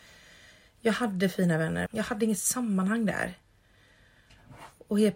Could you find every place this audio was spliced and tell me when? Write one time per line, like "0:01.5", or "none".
0:01.9